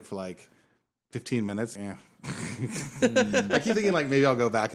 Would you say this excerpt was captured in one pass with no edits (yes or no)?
no